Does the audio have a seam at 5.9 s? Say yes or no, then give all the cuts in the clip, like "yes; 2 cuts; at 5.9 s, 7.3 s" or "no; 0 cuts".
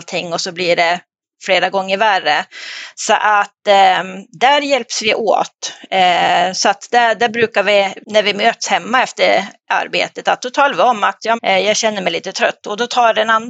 no; 2 cuts; at 8.0 s, 11.4 s